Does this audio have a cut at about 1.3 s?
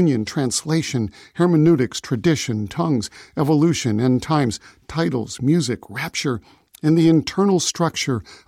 no; 0 cuts

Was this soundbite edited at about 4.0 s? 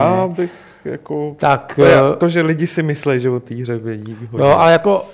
no; 1 cut; at 2.2 s

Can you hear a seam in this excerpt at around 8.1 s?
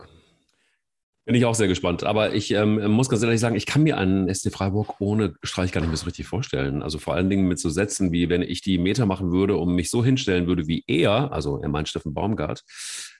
no; 0 cuts

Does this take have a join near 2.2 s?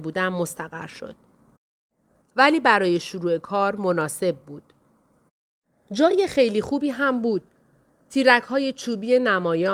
yes; 1 cut; at 2.2 s

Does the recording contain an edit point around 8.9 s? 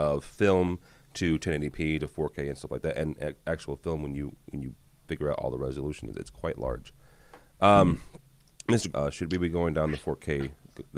yes; 1 cut; at 8.9 s

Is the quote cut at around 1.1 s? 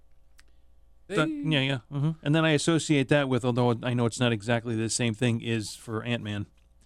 yes; 2 cuts; at 1.1 s, 2.2 s

